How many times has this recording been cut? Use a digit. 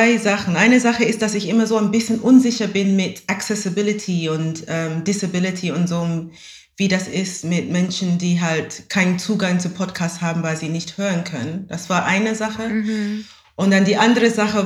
0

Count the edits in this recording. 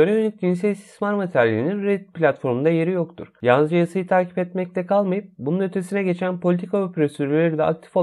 0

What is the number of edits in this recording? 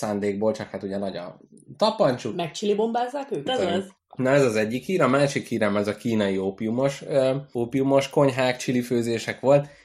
1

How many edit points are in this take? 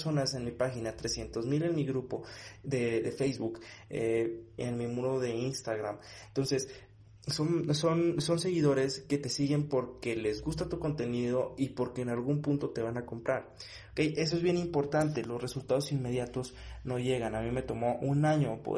1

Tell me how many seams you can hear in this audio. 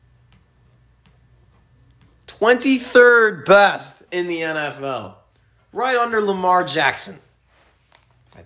1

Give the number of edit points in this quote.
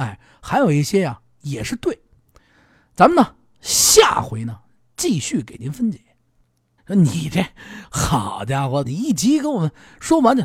2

